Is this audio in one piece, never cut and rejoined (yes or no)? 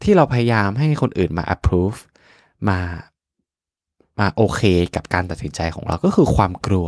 yes